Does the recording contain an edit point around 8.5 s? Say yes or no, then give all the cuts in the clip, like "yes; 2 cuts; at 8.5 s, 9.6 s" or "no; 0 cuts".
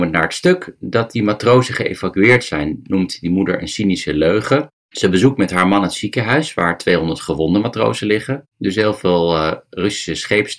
yes; 1 cut; at 8.5 s